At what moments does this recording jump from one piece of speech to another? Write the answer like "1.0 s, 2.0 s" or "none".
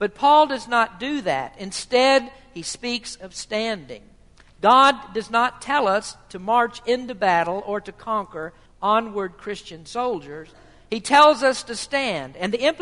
8.7 s